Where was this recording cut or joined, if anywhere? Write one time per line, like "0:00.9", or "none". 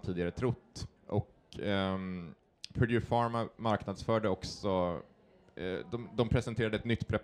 0:01.0